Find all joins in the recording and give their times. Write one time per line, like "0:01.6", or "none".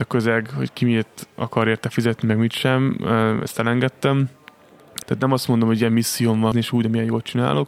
0:05.0
0:06.5